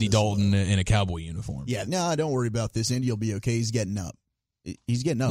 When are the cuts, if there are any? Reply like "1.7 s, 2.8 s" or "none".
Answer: 1.9 s